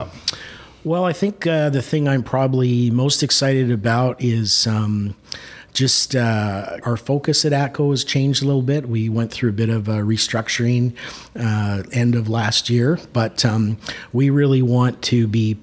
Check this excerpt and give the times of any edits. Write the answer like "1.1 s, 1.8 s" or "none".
6.8 s